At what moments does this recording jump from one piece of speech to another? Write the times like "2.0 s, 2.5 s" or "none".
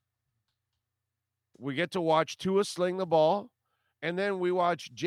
3.9 s

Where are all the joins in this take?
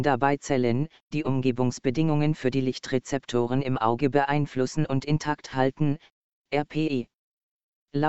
1.1 s, 6.3 s

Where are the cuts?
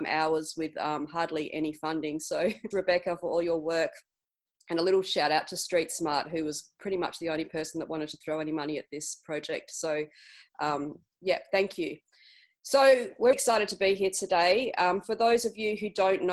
2.7 s, 13.3 s

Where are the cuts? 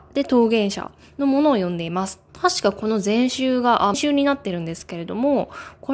2.3 s, 3.9 s

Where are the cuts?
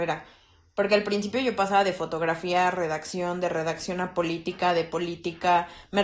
none

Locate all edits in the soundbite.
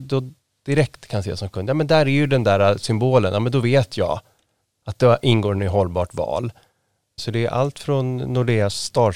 7.2 s

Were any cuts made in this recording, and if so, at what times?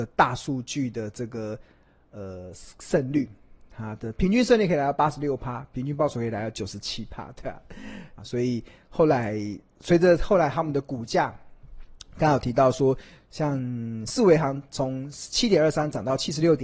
8.2 s

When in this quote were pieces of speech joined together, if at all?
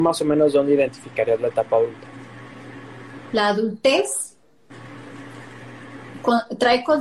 3.3 s

